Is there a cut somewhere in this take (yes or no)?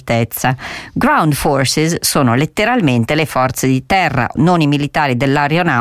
yes